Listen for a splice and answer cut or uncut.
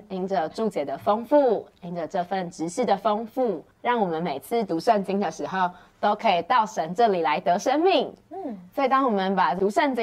cut